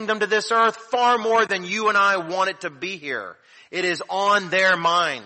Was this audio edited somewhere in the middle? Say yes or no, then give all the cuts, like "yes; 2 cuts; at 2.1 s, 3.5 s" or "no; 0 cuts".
no; 0 cuts